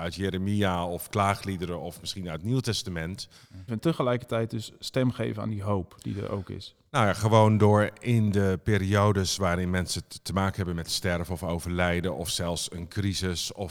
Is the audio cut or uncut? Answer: cut